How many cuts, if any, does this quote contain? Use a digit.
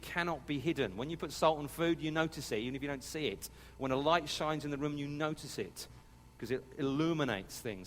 0